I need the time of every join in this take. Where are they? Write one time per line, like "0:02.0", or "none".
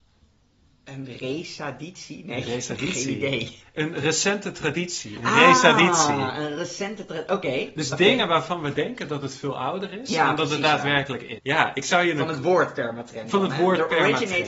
0:11.4